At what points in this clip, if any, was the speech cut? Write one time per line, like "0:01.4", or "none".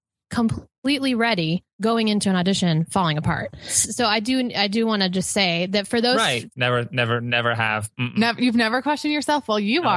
0:06.5